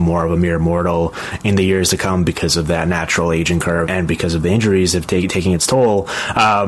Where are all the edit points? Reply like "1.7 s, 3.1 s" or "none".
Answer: 3.9 s